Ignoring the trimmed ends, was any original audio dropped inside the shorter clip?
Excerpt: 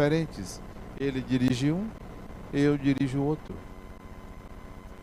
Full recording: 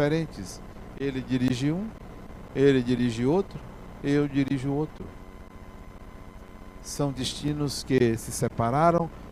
yes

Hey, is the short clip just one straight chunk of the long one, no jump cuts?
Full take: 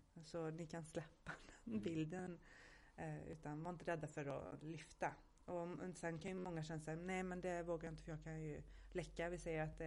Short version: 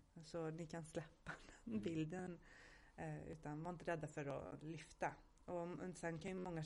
yes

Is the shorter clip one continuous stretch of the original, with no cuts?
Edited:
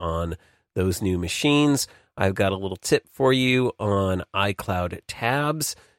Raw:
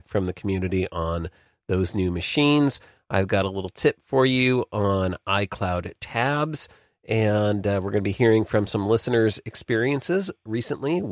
yes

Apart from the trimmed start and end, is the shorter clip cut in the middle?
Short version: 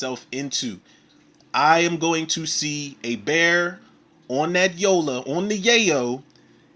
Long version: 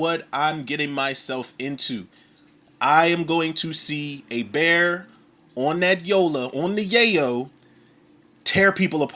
no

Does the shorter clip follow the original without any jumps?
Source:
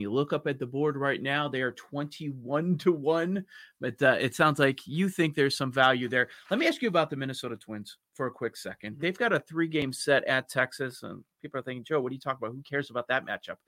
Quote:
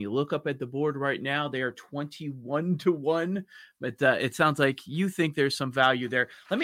yes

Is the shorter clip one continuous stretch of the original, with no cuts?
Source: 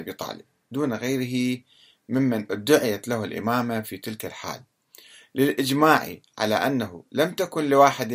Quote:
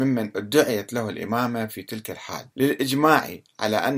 no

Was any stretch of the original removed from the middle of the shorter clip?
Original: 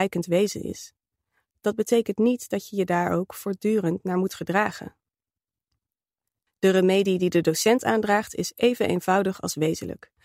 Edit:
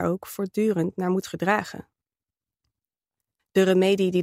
no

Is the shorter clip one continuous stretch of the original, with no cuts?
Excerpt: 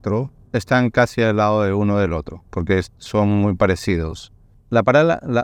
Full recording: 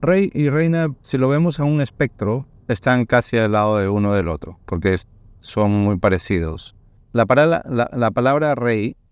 no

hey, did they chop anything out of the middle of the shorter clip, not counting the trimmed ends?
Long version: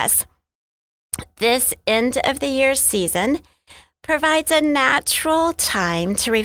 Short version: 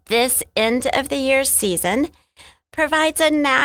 no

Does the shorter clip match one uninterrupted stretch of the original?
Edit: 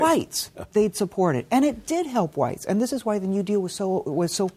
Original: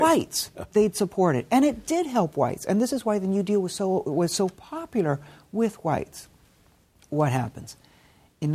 yes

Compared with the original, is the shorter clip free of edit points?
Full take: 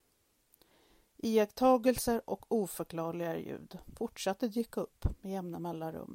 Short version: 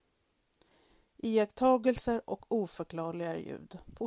yes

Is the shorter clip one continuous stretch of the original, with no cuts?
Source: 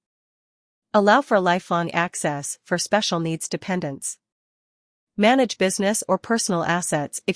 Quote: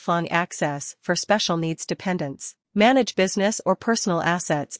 no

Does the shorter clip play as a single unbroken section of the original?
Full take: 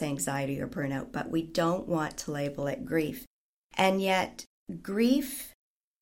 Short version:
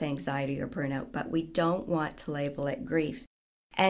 yes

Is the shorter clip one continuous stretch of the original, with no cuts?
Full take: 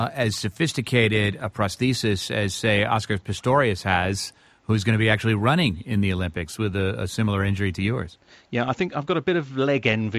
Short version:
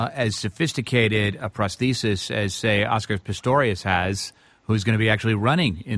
yes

